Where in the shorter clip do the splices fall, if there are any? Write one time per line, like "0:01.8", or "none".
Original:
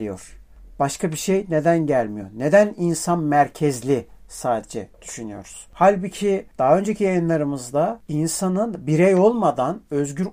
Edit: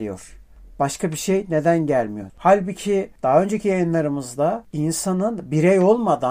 0:02.3